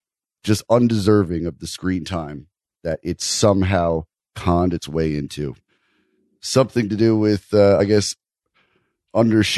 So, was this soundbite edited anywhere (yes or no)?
no